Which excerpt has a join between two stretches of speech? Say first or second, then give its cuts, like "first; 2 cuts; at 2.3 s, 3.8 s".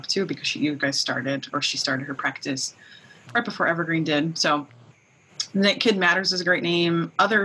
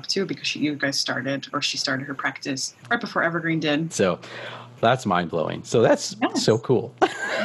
second; 2 cuts; at 2.8 s, 3.9 s